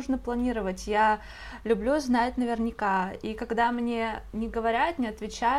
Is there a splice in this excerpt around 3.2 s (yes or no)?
no